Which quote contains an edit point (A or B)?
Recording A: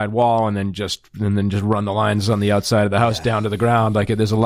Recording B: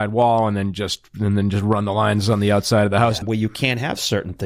B